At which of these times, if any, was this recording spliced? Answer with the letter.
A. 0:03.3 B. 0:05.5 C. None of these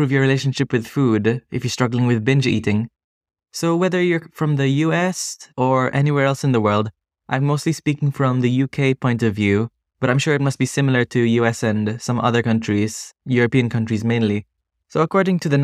B